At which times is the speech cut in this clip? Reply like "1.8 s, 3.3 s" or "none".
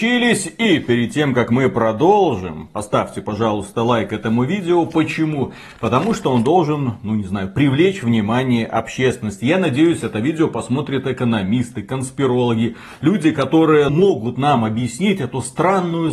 13.9 s